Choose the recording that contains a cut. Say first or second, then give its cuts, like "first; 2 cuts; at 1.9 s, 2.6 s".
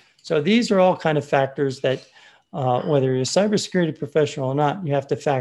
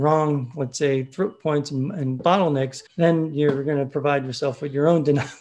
second; 1 cut; at 2.9 s